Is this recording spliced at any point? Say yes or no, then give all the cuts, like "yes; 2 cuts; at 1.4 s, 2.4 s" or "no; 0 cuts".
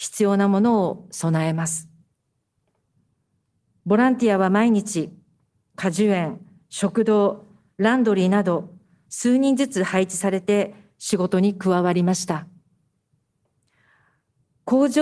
yes; 2 cuts; at 5.7 s, 9.1 s